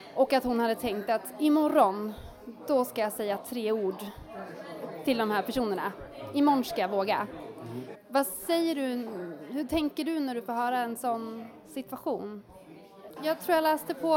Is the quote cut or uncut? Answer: cut